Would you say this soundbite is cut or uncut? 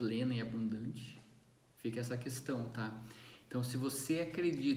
uncut